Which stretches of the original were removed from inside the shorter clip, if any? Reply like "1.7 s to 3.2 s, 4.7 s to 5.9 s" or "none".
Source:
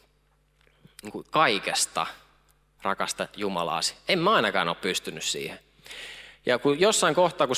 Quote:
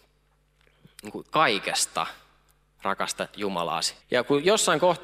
4.0 s to 6.4 s